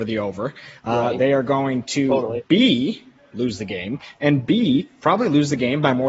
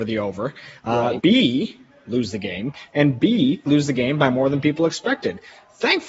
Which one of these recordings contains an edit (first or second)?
second